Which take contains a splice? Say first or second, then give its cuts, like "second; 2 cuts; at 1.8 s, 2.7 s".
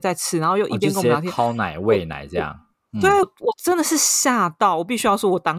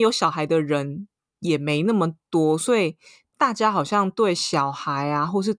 first; 1 cut; at 3.2 s